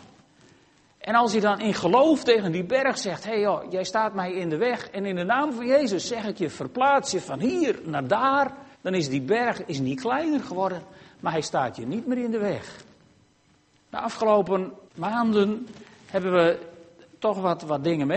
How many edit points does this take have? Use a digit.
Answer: 3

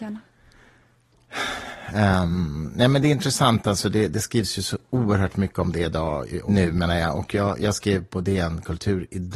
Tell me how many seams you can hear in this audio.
1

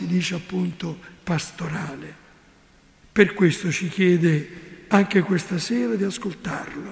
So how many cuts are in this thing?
1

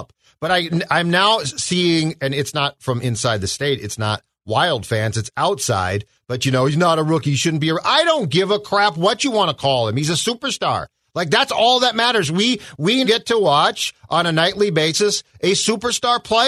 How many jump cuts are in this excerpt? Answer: 1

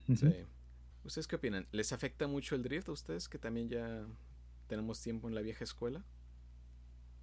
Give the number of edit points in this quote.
1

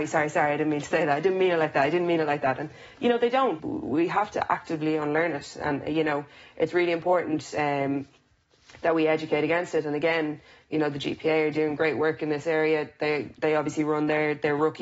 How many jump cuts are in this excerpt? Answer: 1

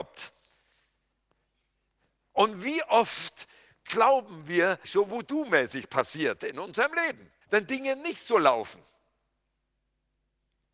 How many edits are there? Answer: 2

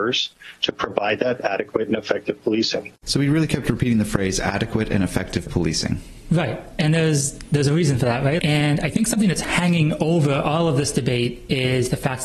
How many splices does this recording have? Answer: 2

